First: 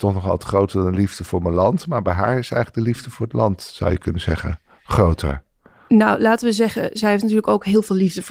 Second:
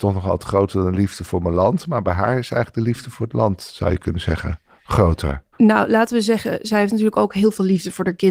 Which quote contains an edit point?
second; 1 cut; at 5.5 s

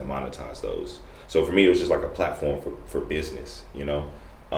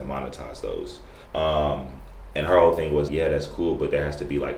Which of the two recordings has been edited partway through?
second; 2 cuts; at 1.3 s, 3.1 s

